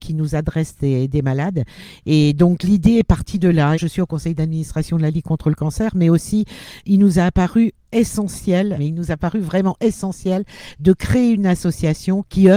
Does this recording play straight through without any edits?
no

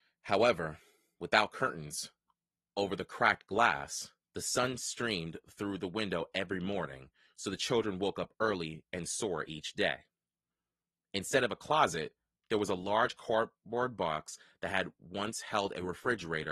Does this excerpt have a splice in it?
no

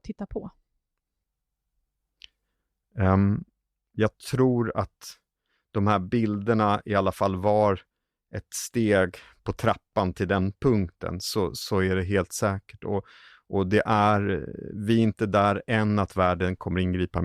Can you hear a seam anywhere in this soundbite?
no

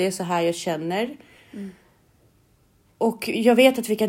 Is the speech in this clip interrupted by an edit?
no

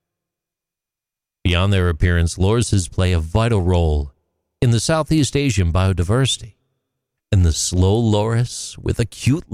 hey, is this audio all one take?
no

